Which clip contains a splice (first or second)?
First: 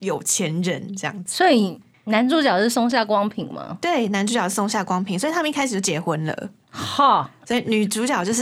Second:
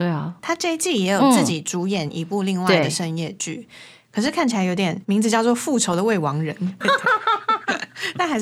second